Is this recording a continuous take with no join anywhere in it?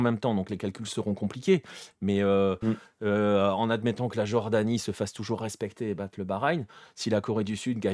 yes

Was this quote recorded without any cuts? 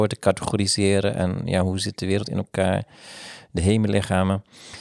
yes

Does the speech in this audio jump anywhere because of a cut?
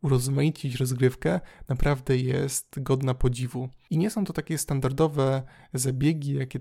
no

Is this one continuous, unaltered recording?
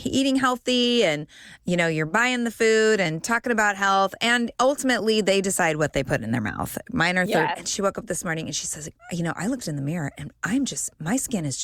no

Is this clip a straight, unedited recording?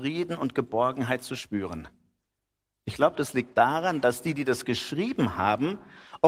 yes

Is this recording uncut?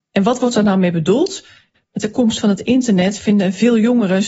no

